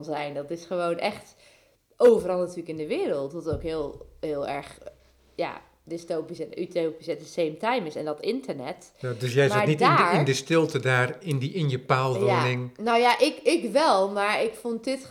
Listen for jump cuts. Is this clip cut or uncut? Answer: uncut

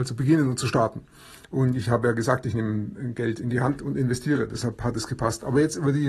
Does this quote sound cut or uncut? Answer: uncut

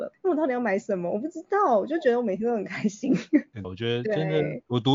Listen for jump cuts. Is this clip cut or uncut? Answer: cut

